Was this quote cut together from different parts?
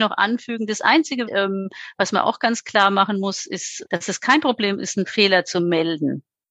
yes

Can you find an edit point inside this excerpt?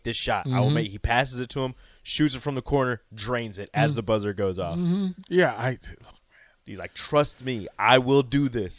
no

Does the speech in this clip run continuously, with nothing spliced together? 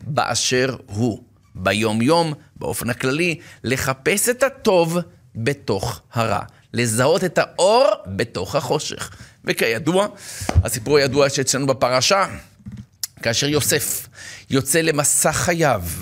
yes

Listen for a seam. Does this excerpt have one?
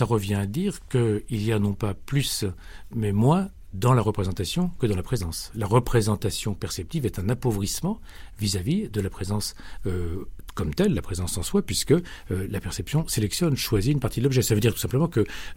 no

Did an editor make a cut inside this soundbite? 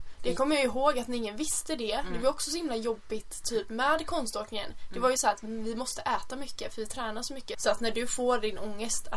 yes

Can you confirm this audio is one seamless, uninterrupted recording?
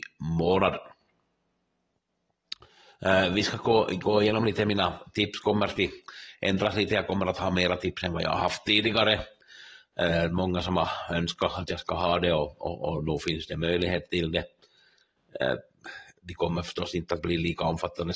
yes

